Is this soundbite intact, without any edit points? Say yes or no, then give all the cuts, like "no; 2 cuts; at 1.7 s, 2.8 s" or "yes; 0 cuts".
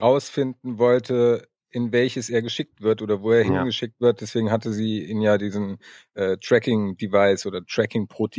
yes; 0 cuts